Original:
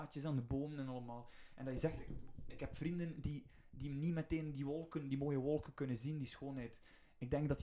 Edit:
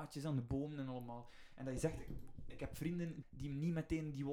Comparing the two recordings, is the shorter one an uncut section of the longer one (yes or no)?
no